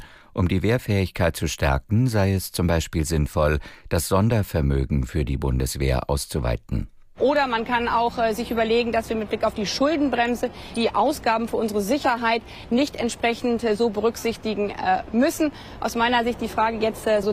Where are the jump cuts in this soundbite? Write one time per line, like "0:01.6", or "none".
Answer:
0:10.7